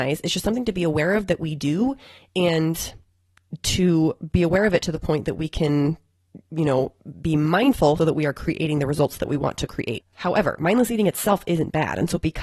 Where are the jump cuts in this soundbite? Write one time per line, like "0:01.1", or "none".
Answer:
0:08.0
0:10.0